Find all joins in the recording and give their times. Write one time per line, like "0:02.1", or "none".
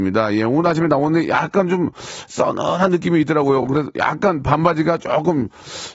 none